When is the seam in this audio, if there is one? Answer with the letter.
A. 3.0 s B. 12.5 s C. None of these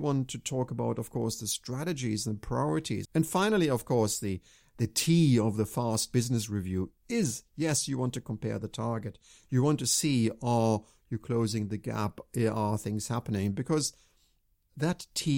A